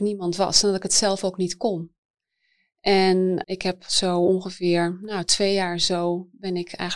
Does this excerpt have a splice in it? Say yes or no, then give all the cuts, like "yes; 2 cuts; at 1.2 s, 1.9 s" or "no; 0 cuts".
yes; 1 cut; at 3.4 s